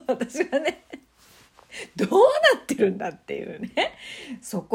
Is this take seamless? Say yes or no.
yes